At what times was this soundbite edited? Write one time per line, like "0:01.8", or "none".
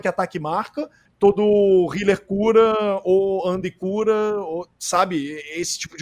0:01.1